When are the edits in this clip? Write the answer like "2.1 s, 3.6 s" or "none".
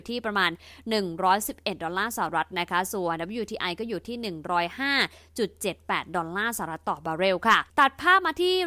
7.7 s